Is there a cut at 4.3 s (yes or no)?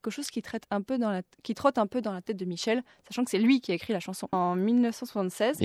yes